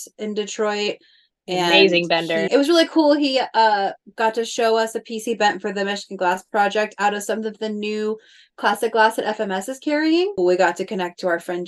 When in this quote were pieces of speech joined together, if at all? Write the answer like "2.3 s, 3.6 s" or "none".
2.5 s, 10.4 s